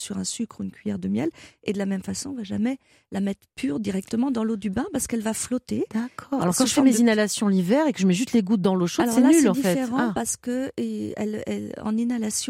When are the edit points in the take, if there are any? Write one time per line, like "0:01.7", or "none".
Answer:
none